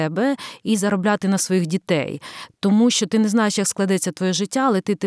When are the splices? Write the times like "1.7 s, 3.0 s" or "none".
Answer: none